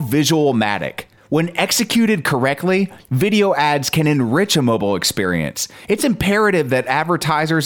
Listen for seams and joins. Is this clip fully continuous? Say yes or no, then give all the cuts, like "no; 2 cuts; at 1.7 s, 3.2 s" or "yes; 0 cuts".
yes; 0 cuts